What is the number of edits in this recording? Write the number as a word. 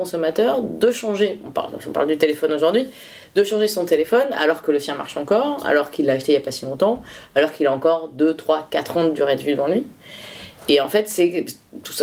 zero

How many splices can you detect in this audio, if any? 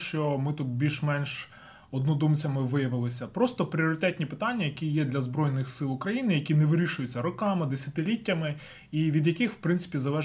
zero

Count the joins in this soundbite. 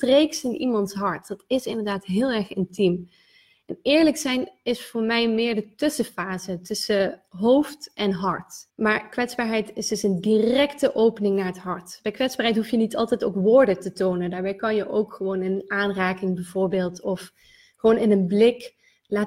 one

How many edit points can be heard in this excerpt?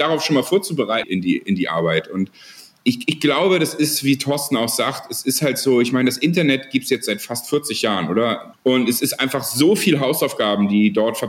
two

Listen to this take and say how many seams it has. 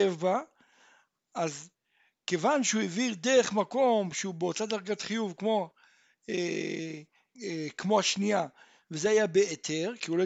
one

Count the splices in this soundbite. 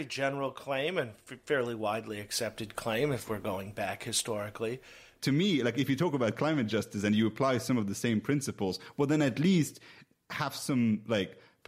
one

